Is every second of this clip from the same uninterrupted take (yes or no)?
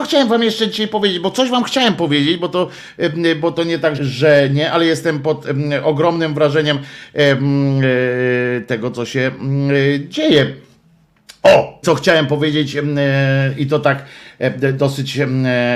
no